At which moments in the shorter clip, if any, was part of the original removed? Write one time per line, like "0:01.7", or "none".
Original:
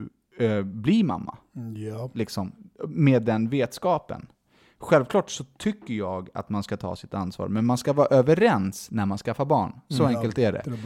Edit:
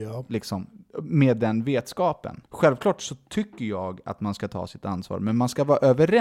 0:02.5